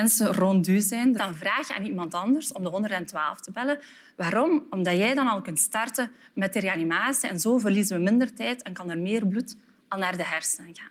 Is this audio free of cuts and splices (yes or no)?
no